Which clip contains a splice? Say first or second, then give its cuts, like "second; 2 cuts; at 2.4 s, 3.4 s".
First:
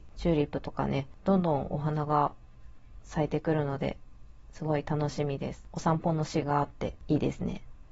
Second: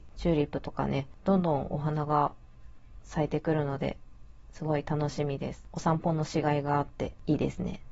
first; 1 cut; at 6.4 s